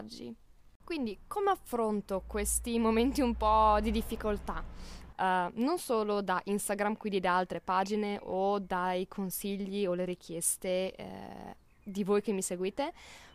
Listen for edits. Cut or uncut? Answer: cut